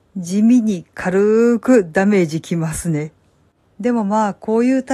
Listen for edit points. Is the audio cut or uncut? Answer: uncut